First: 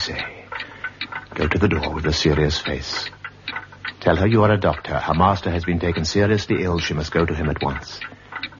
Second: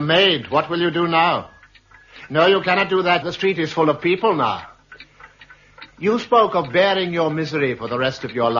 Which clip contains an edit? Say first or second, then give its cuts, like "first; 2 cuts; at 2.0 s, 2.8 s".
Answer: second; 1 cut; at 3.2 s